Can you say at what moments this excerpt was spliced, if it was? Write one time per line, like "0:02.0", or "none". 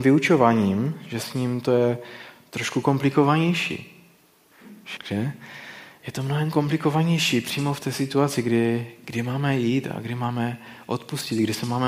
0:05.0